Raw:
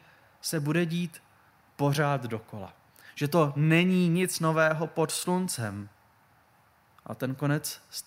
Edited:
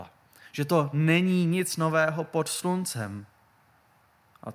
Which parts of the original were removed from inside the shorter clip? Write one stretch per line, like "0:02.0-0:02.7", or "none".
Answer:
none

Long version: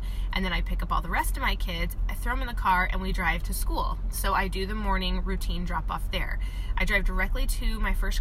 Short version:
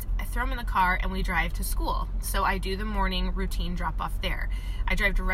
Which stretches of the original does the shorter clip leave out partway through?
none

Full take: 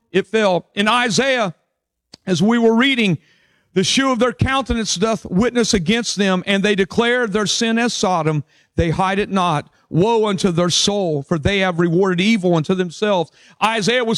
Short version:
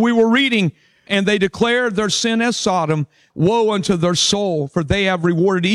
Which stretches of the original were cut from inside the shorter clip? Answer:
0:03.5-0:06.4
0:08.7-0:09.8

